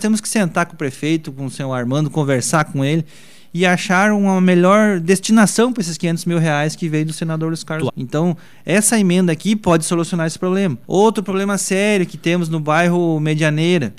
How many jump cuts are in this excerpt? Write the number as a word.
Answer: two